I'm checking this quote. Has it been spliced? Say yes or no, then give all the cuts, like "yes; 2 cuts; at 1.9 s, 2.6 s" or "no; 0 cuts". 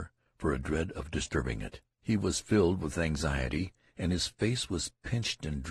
yes; 1 cut; at 2.0 s